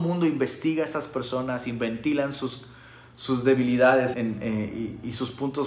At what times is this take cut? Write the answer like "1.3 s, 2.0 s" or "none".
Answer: 4.1 s